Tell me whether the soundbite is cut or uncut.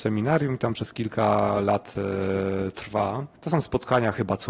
cut